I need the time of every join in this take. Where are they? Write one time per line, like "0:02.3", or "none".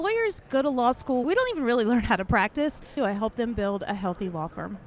0:01.2
0:03.0